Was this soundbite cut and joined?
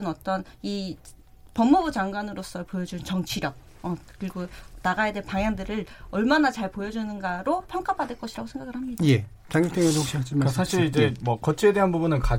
no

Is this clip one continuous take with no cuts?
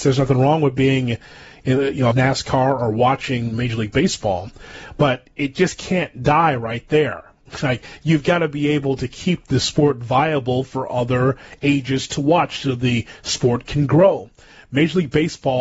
no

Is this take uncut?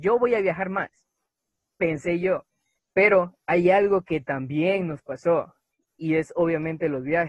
no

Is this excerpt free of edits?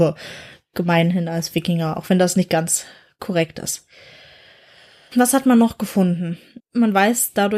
no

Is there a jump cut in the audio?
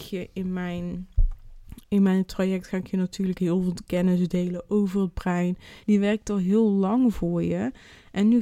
yes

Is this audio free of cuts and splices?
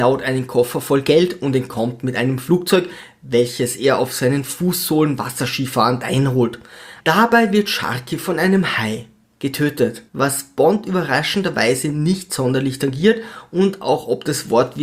no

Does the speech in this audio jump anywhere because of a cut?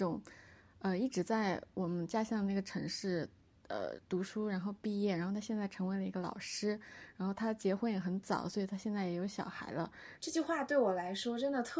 yes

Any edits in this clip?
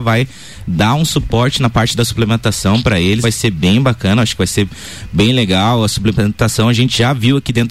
yes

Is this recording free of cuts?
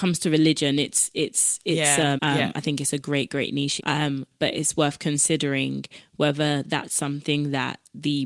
no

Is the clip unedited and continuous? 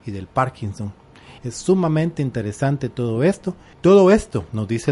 no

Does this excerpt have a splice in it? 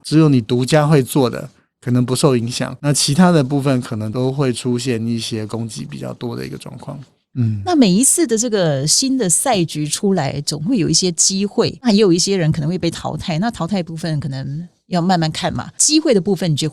no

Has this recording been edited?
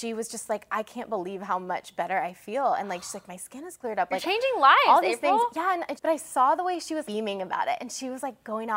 yes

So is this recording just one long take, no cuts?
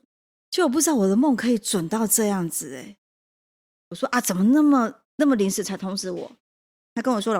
no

